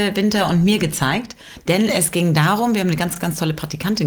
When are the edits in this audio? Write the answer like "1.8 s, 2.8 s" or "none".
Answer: none